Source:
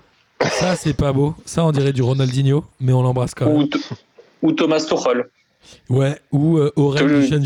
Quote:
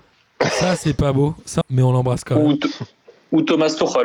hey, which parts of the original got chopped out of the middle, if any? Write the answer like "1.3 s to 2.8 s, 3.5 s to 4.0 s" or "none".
1.6 s to 2.7 s